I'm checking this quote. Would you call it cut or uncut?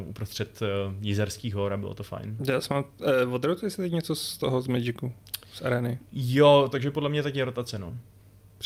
cut